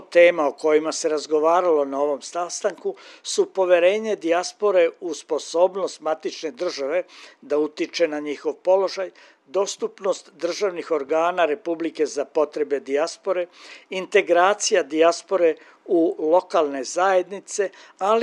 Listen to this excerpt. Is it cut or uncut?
uncut